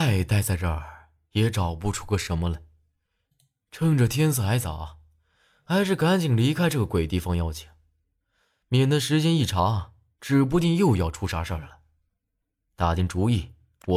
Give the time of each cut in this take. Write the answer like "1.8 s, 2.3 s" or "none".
none